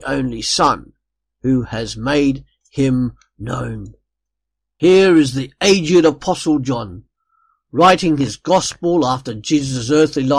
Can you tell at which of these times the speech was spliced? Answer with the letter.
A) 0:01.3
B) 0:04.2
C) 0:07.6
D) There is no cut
A